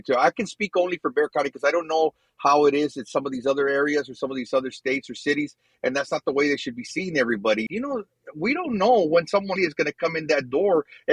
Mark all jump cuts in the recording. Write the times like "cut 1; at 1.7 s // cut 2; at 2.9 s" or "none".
cut 1; at 5.7 s // cut 2; at 7.7 s // cut 3; at 9.6 s